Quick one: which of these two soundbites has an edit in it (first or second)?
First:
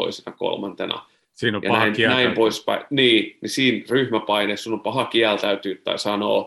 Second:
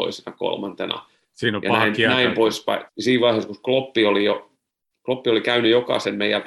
second